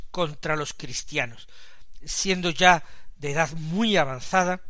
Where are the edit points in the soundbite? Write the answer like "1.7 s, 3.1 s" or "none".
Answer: none